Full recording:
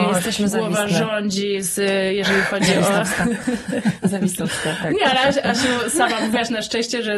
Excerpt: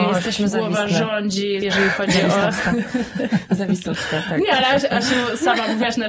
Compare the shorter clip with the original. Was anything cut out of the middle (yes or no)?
yes